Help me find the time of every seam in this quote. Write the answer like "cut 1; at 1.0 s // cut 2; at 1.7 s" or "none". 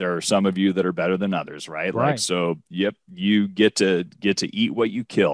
none